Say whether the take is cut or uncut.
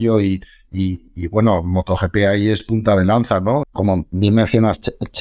cut